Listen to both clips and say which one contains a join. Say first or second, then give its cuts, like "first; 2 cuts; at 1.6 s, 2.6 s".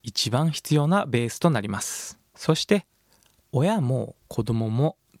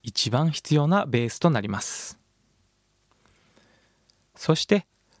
first; 1 cut; at 2.3 s